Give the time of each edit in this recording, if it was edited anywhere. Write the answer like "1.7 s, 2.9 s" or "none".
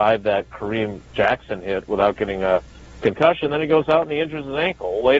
none

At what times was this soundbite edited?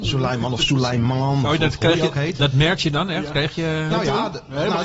none

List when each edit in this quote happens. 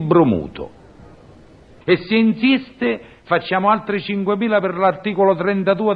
1.8 s

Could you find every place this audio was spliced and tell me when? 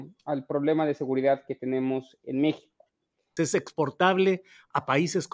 3.4 s

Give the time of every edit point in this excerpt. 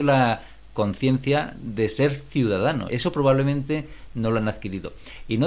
2.9 s

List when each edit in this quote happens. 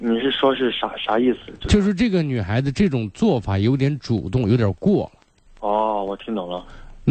5.5 s

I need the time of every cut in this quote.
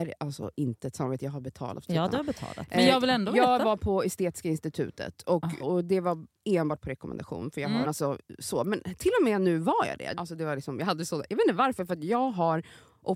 5.6 s, 7.8 s, 10.1 s

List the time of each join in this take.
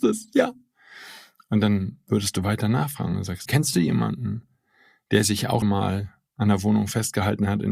3.5 s, 5.6 s

